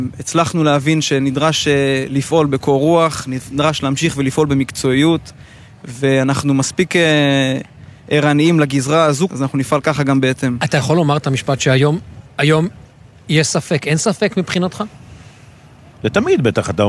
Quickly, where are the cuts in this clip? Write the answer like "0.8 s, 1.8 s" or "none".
9.3 s